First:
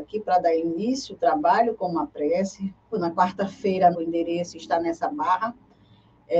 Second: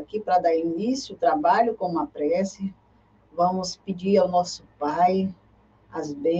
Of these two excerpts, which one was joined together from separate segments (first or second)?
first